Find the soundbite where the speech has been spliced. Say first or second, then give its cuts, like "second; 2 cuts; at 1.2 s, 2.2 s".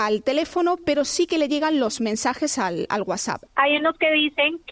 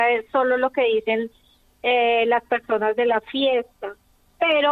first; 1 cut; at 3.5 s